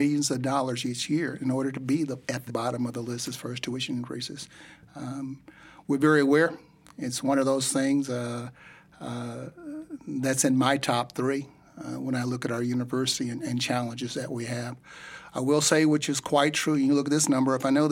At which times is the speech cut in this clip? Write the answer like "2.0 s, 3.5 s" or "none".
2.5 s

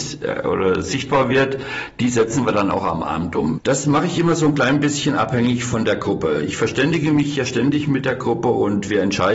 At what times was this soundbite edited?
3.6 s

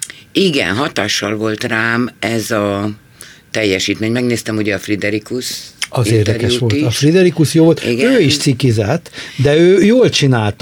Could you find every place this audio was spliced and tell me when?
none

